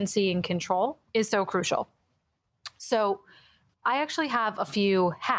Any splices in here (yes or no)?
yes